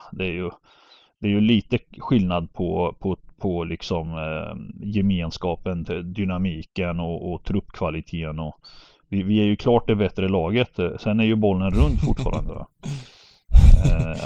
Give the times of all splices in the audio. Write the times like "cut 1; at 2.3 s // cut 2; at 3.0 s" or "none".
none